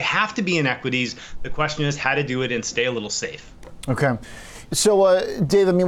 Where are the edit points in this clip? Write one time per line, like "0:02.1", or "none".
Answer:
none